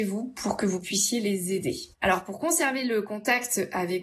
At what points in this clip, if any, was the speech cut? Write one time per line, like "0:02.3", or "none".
0:01.9

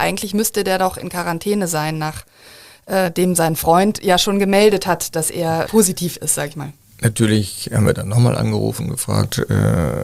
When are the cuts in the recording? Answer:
0:05.7

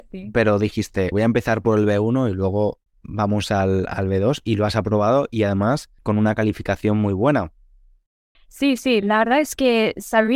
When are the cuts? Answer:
0:01.1
0:06.0
0:08.3

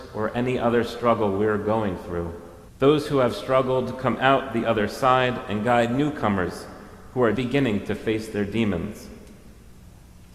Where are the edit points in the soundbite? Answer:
0:02.7
0:07.3

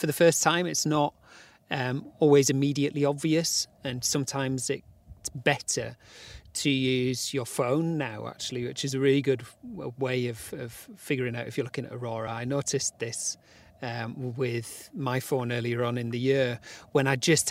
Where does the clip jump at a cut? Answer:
none

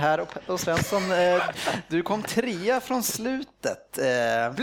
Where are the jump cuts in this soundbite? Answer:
0:01.5

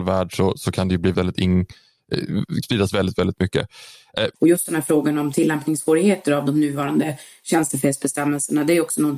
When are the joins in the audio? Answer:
0:01.1
0:02.6
0:04.3

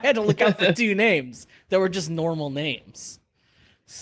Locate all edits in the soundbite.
none

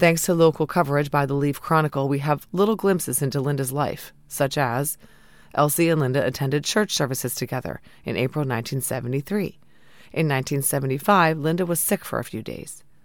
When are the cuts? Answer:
none

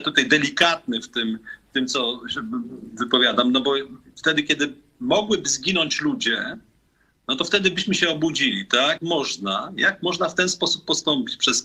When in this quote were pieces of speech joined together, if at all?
none

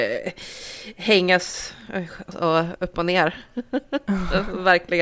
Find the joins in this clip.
0:02.3

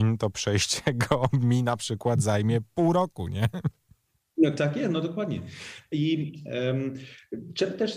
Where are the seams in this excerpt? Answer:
none

